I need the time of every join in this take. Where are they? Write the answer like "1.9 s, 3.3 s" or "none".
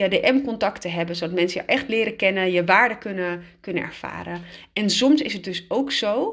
none